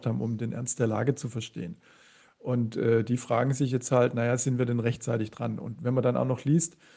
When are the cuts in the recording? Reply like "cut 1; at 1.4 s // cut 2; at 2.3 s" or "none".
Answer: none